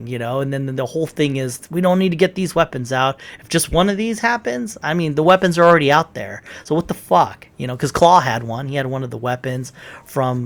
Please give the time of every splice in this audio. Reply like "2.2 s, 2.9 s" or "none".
none